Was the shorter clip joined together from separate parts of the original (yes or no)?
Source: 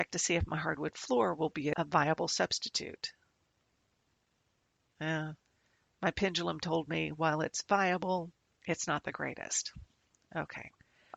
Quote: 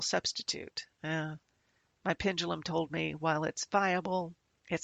yes